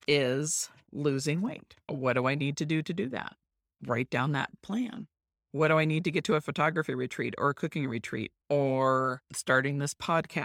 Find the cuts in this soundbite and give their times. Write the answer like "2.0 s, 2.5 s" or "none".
none